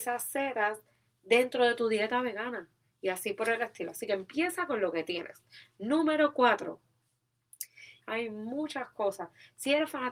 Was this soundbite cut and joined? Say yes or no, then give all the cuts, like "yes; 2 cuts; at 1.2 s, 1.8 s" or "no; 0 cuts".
yes; 1 cut; at 8.0 s